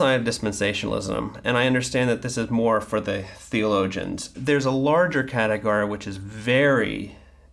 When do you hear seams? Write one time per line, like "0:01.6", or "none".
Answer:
0:04.3